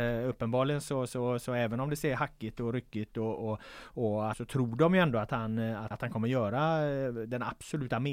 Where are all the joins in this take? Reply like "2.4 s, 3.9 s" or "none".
4.3 s, 5.9 s